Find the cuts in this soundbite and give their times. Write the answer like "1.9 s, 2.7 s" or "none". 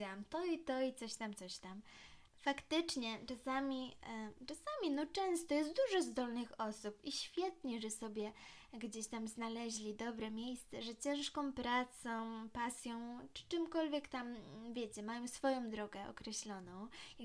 2.3 s, 10.8 s